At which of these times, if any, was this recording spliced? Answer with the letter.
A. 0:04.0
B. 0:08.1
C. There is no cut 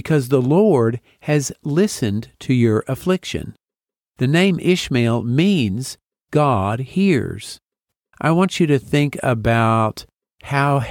B